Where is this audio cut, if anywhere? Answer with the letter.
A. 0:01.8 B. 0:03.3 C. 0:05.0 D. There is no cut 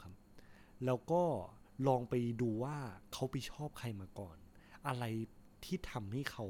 D